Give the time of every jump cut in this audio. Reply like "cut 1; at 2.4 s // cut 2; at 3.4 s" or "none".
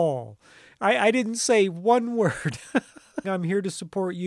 cut 1; at 3.2 s